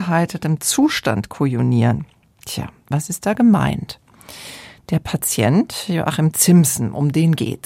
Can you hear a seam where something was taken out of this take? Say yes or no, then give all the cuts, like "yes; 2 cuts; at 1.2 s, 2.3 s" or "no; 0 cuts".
no; 0 cuts